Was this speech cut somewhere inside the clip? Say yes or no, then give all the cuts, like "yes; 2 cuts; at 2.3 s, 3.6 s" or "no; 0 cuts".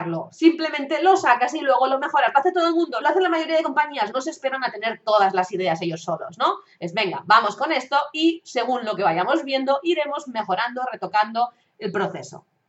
yes; 2 cuts; at 3.0 s, 4.1 s